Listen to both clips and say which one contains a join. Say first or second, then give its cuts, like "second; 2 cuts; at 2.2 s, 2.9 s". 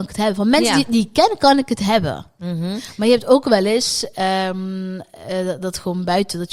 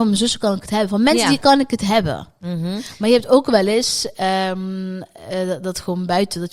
second; 1 cut; at 1.4 s